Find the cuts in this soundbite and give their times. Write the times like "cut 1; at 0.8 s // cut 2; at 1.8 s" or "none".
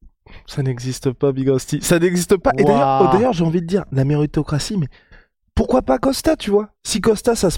none